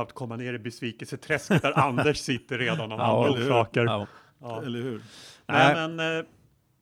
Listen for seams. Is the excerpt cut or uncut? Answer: uncut